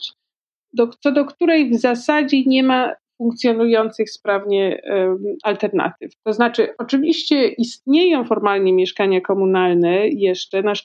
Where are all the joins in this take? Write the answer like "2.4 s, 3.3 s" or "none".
6.2 s

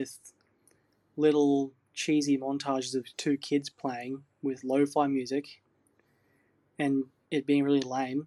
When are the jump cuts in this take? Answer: 3.1 s

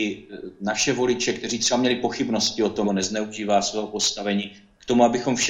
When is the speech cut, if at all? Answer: 2.8 s

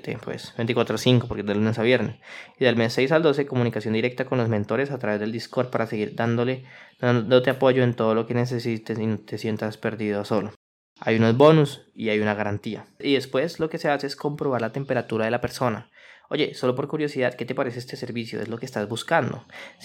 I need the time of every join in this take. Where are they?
none

